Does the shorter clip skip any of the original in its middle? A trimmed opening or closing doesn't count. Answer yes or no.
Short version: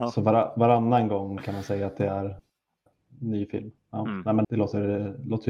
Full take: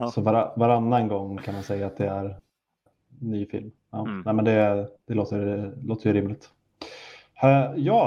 yes